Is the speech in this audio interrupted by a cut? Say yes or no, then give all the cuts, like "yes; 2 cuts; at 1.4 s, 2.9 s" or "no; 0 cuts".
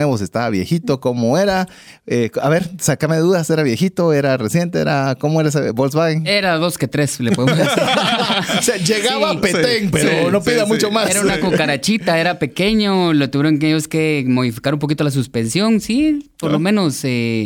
no; 0 cuts